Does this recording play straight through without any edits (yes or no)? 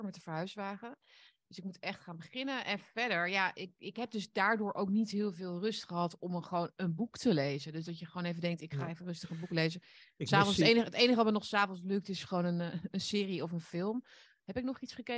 yes